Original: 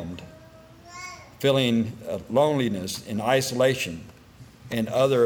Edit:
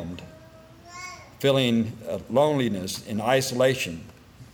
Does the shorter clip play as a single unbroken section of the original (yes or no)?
yes